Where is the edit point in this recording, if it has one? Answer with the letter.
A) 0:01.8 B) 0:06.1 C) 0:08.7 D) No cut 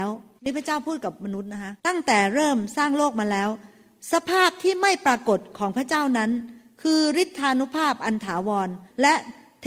A